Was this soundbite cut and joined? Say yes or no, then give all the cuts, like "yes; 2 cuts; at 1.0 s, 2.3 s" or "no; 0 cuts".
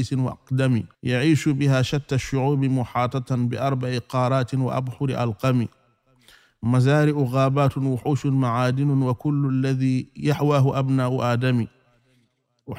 yes; 1 cut; at 0.9 s